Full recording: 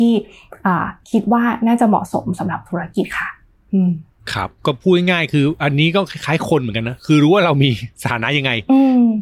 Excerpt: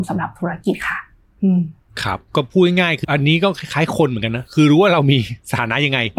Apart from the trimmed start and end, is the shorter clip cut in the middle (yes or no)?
yes